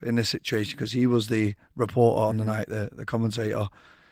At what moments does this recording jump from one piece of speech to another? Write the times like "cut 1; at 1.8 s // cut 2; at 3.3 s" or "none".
none